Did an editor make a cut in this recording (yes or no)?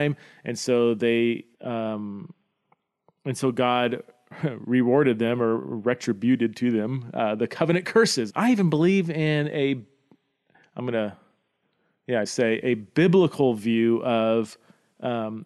yes